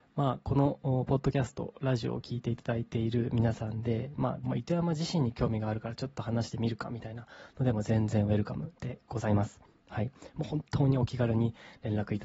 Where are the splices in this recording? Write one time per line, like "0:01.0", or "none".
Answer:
0:04.4